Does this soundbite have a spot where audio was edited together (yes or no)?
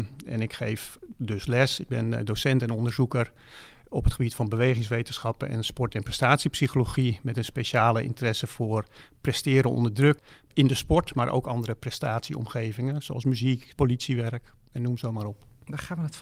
yes